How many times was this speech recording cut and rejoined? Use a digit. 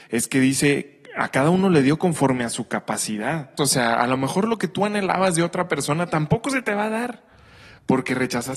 1